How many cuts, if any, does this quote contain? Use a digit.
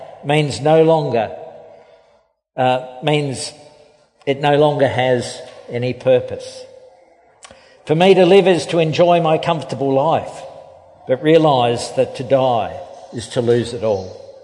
0